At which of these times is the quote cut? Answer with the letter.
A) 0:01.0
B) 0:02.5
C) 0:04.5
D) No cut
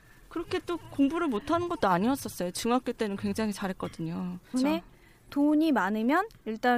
C